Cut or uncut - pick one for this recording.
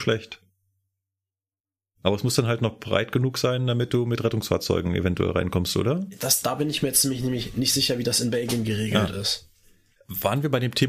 uncut